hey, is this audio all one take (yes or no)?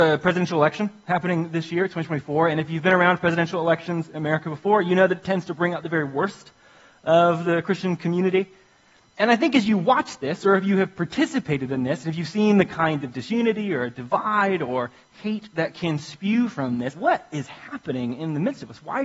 no